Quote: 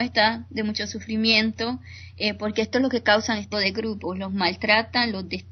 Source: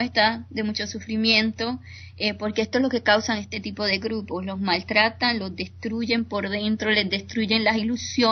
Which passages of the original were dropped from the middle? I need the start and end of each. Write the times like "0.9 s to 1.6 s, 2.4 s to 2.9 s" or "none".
3.5 s to 3.8 s